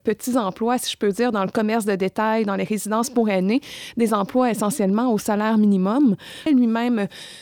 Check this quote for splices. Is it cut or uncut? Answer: cut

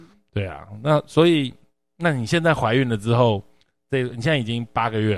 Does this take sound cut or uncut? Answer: uncut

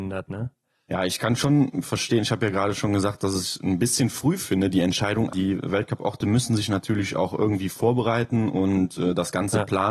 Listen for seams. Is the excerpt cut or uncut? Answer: cut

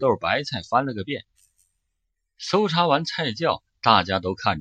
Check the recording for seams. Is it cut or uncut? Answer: uncut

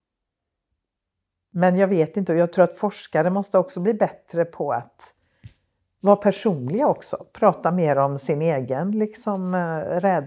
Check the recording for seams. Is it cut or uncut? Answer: uncut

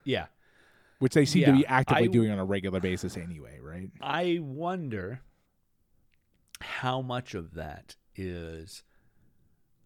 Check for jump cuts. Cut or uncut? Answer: uncut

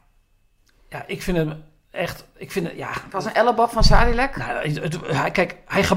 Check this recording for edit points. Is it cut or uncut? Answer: uncut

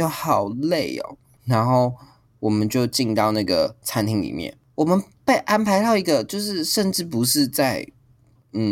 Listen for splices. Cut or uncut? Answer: uncut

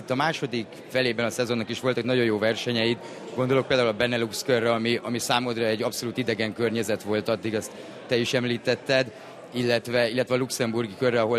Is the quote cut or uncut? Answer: uncut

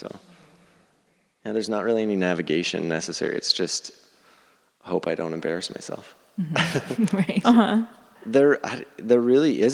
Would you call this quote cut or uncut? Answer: cut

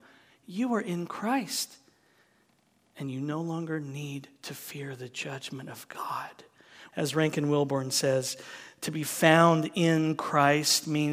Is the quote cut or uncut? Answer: cut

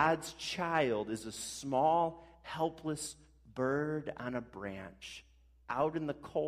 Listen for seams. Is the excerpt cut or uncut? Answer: uncut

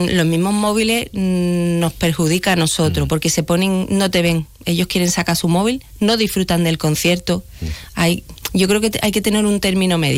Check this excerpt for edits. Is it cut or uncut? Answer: uncut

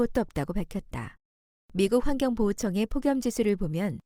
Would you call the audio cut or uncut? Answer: cut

